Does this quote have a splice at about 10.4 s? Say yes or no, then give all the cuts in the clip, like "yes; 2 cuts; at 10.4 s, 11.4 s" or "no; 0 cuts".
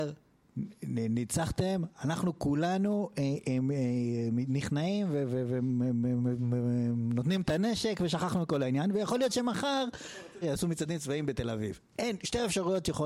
yes; 1 cut; at 10.4 s